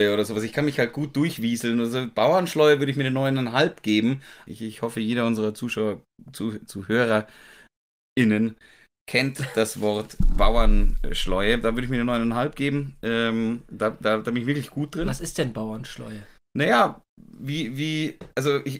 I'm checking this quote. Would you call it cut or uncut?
cut